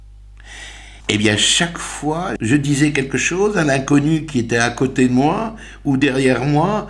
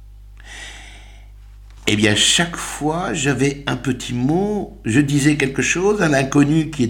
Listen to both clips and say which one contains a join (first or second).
first